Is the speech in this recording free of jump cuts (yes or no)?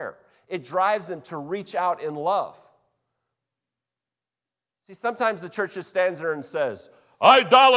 yes